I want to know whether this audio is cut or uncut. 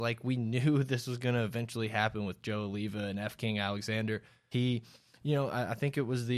cut